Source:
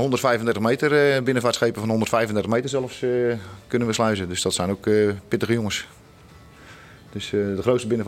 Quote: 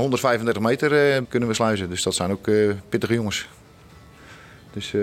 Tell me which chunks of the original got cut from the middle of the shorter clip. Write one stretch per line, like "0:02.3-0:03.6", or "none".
0:01.2-0:03.6